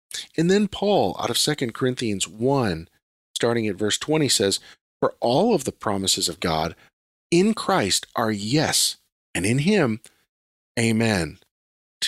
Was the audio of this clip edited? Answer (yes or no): no